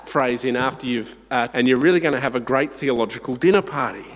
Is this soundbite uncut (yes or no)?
no